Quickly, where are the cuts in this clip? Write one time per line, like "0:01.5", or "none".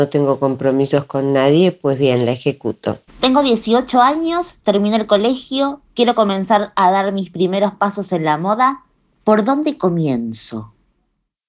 0:03.1